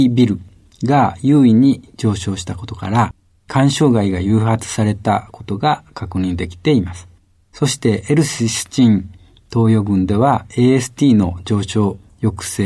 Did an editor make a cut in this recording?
no; 0 cuts

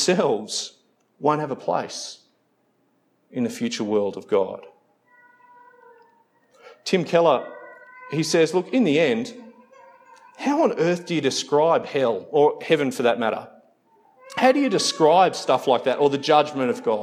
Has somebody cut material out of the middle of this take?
no; 0 cuts

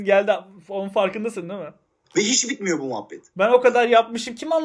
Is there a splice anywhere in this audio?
yes; 2 cuts; at 2.0 s, 3.3 s

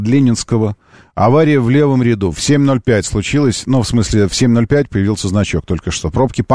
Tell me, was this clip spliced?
no; 0 cuts

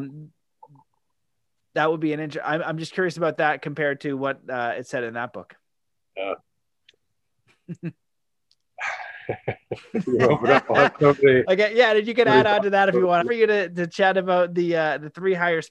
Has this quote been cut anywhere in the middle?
yes; 1 cut; at 13.2 s

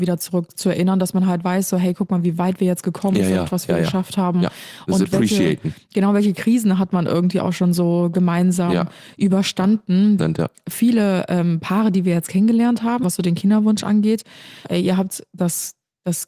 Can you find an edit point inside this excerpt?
yes; 3 cuts; at 10.2 s, 13.0 s, 14.6 s

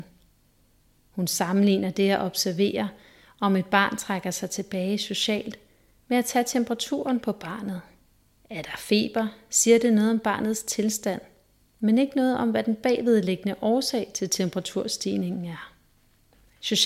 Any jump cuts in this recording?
no; 0 cuts

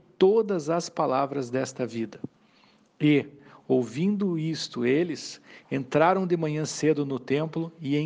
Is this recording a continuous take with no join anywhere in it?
yes; 0 cuts

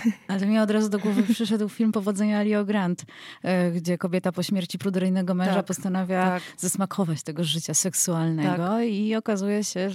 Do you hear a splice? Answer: no; 0 cuts

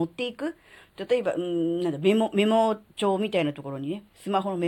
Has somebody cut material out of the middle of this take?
no; 0 cuts

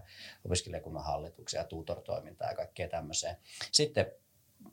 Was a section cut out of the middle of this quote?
yes; 1 cut; at 3.7 s

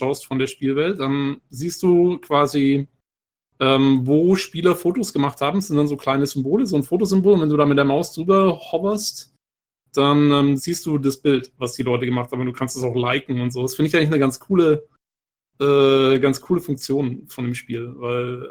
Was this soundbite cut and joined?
no; 0 cuts

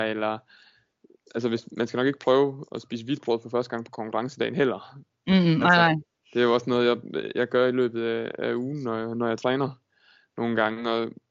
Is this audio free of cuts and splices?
yes; 0 cuts

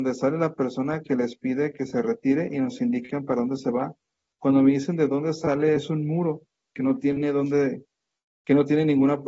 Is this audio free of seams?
yes; 0 cuts

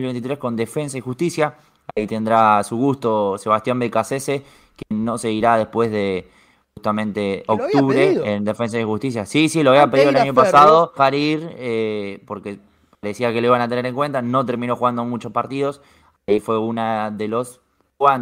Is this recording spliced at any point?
yes; 1 cut; at 11.0 s

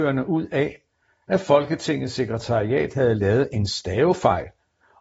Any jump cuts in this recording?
no; 0 cuts

